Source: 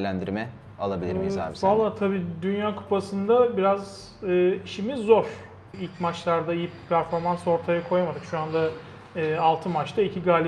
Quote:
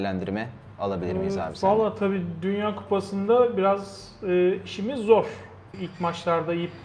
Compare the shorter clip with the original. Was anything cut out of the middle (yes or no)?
no